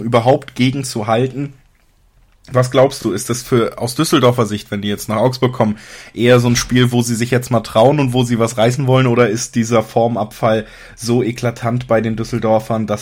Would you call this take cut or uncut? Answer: uncut